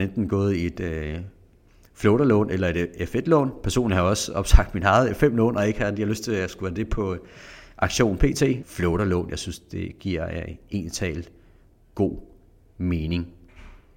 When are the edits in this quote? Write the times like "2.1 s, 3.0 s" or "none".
8.6 s